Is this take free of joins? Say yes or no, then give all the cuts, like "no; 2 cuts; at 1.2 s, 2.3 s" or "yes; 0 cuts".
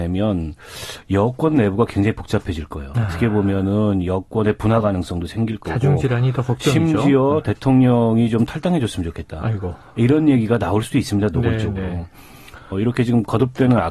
no; 1 cut; at 12.7 s